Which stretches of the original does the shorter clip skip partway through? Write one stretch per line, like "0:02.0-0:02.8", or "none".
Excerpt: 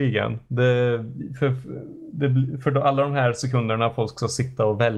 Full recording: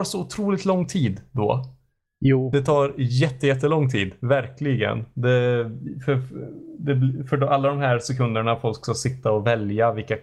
none